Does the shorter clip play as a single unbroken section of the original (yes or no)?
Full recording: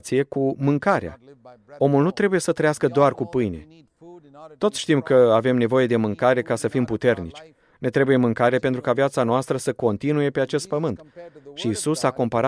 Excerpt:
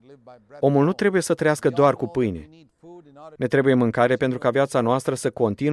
no